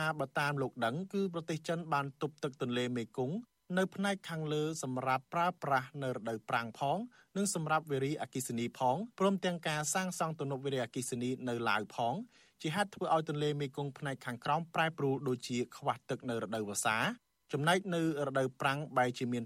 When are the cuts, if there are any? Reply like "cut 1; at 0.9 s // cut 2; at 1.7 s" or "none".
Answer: cut 1; at 9.1 s